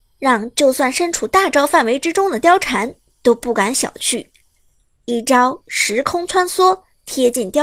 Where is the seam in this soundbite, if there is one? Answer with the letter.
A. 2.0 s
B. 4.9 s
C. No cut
C